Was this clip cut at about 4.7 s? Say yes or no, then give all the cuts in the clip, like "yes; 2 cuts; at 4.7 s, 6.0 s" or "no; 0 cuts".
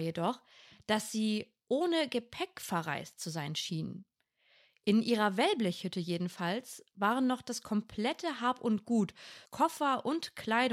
no; 1 cut; at 9.4 s